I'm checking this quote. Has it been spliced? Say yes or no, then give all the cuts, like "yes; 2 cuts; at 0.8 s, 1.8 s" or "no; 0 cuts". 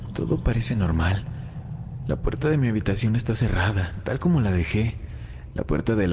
no; 0 cuts